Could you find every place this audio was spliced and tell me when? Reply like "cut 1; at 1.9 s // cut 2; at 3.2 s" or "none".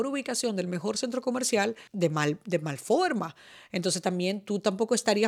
cut 1; at 1.9 s